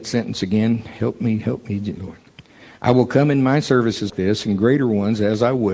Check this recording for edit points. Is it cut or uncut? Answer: cut